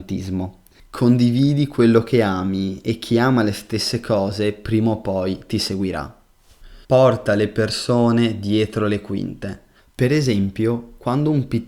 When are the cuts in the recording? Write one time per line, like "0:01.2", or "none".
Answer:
0:06.8
0:09.8